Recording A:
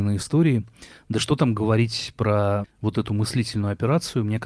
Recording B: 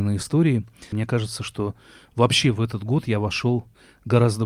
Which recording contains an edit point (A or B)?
B